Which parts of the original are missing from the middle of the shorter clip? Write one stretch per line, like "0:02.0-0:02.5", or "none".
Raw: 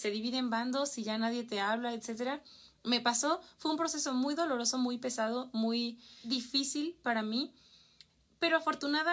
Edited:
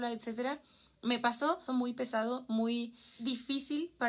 0:03.5-0:04.7